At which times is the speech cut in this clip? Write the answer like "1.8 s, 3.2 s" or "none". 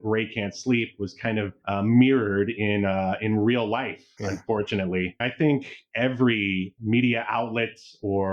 4.2 s, 5.2 s